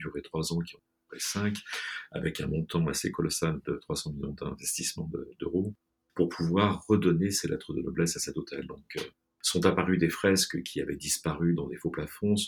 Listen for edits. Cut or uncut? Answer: uncut